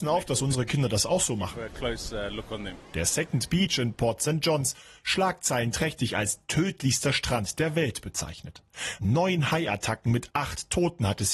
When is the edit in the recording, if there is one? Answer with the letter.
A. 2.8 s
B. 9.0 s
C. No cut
A